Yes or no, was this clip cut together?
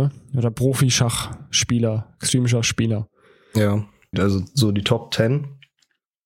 yes